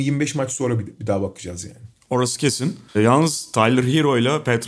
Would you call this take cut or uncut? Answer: cut